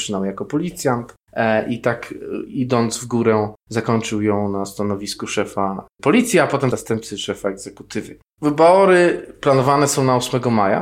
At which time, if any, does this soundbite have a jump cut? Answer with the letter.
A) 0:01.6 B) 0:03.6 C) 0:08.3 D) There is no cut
C